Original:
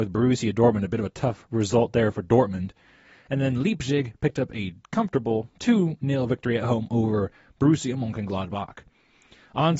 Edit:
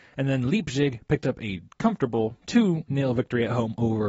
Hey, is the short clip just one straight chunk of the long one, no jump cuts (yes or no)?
yes